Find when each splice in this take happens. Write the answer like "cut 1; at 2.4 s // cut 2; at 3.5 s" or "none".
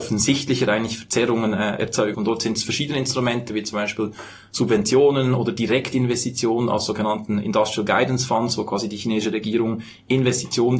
cut 1; at 2.1 s